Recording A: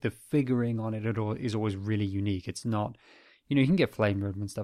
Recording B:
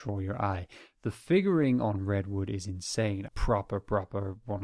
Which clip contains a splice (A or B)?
B